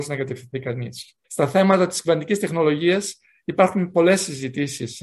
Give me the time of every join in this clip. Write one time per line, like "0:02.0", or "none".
0:01.2